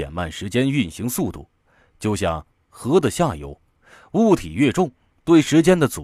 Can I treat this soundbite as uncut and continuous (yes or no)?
yes